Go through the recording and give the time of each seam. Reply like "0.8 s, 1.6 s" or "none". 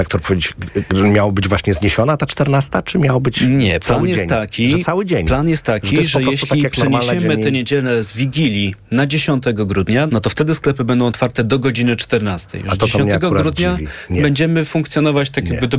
10.1 s